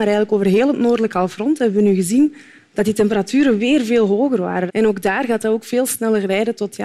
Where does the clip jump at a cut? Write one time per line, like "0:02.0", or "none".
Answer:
0:04.7